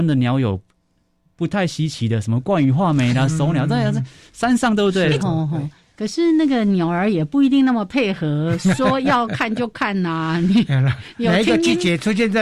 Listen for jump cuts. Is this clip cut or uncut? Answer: cut